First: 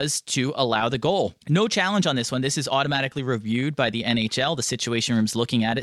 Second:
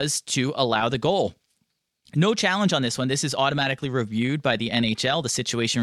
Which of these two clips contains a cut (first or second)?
first